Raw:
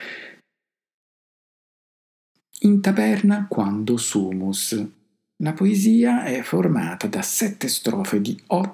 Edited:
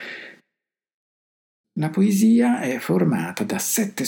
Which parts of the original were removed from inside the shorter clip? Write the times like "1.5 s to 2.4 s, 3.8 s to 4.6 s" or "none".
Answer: 1.6 s to 5.3 s